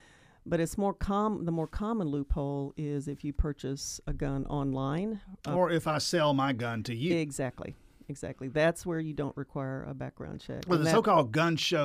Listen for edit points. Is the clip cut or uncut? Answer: uncut